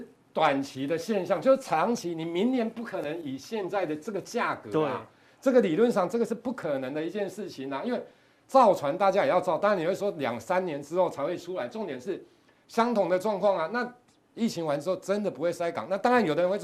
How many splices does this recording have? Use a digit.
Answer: 0